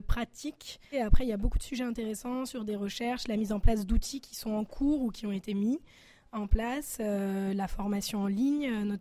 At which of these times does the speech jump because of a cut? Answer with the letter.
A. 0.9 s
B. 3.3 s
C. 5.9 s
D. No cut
A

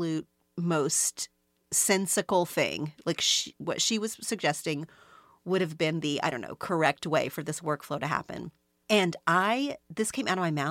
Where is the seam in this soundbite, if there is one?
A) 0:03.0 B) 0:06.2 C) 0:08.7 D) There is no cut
D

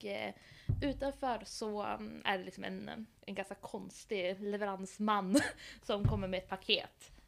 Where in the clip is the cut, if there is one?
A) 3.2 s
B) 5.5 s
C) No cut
A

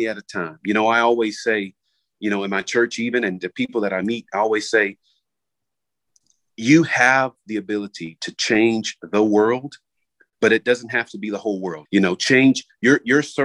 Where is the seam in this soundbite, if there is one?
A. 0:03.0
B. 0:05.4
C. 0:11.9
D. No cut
C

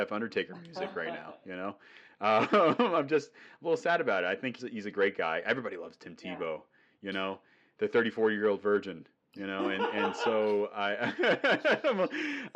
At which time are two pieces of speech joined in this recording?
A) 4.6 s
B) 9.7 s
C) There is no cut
A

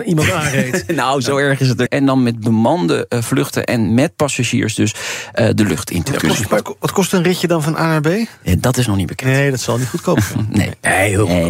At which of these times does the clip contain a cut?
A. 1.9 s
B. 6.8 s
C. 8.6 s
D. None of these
A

